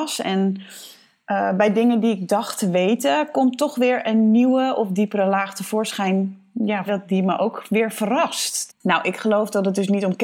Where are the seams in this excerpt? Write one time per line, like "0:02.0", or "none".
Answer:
0:06.9
0:08.7